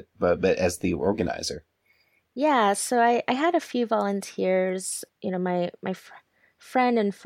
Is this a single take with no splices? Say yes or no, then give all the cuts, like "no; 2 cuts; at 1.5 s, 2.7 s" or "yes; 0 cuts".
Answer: yes; 0 cuts